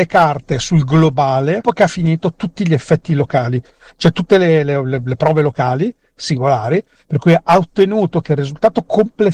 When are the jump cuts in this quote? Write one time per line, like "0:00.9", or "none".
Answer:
none